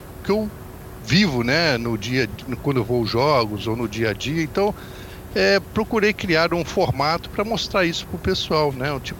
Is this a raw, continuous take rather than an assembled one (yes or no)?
yes